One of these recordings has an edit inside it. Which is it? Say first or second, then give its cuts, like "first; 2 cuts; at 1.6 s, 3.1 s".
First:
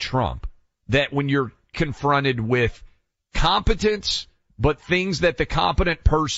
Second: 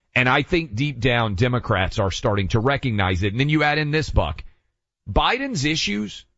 first; 1 cut; at 1.7 s